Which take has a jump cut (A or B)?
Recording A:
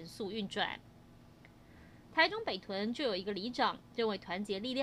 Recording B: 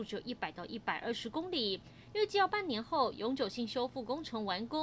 A